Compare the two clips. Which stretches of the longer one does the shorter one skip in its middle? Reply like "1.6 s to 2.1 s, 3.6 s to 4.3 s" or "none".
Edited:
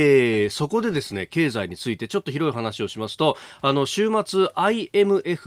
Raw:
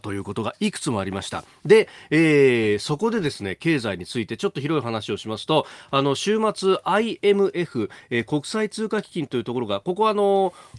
none